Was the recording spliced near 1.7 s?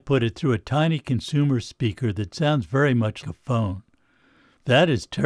no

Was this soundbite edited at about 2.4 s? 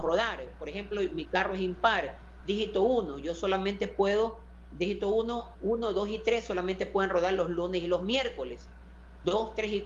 no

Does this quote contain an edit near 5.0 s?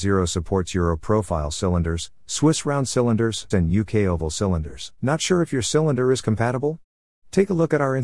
yes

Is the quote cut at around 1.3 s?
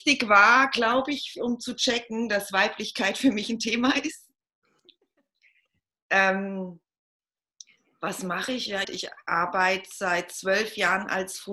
yes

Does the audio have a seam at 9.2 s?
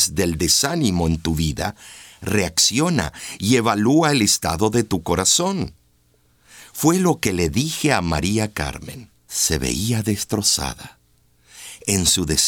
yes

